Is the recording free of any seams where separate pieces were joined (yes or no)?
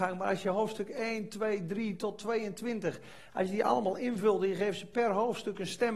yes